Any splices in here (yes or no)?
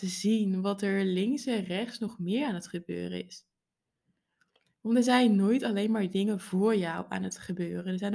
no